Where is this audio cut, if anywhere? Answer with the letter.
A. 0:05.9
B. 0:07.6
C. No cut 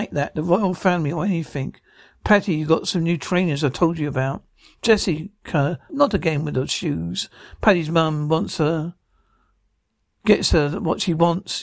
A